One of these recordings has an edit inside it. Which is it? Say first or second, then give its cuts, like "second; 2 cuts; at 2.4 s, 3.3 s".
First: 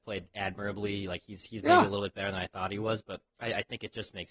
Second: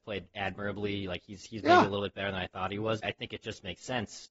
second; 1 cut; at 3.0 s